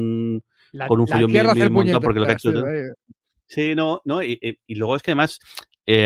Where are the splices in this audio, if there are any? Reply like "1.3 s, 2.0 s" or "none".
none